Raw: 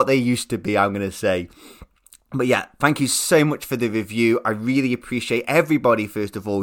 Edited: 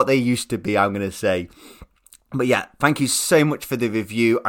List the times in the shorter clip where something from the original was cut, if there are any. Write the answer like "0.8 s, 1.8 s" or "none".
none